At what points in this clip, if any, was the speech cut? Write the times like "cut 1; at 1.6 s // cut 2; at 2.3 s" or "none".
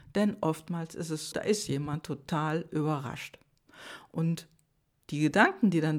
cut 1; at 1.3 s